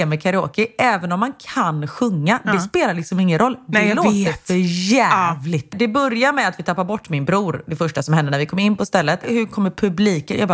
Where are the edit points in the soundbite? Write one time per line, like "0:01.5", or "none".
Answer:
0:05.7
0:09.2